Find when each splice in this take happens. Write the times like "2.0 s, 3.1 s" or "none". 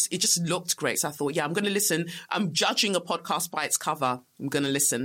none